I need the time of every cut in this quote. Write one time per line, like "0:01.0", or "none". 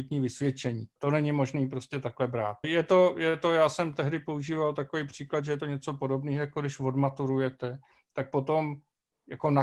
0:01.0
0:02.6